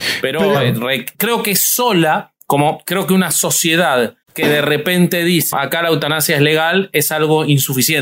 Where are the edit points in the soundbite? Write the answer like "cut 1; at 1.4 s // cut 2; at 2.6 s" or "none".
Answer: cut 1; at 1.1 s // cut 2; at 4.2 s // cut 3; at 5.5 s